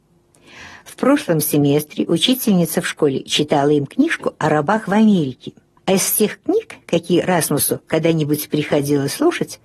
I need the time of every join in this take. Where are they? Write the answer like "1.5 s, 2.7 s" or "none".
5.8 s